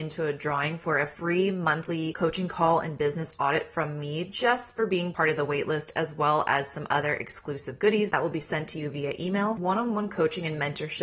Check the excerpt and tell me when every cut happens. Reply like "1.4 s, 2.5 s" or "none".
none